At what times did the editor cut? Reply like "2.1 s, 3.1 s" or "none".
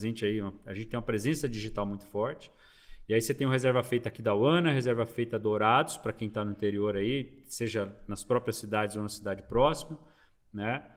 none